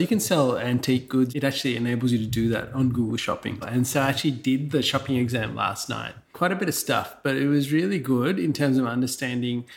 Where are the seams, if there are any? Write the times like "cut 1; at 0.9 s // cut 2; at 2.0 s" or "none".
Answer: cut 1; at 1.3 s // cut 2; at 3.6 s